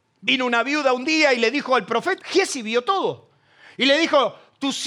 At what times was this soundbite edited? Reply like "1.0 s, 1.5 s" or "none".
2.2 s